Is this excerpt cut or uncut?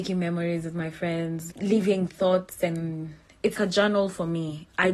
cut